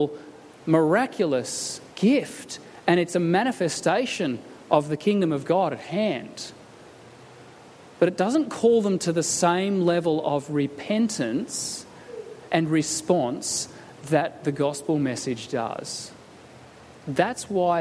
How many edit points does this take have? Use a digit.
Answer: 1